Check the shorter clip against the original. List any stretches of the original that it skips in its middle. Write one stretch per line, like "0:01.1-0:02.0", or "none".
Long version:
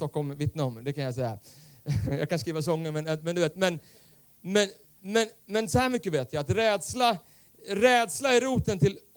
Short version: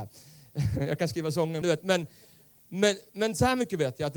0:02.9-0:03.3
0:04.8-0:05.4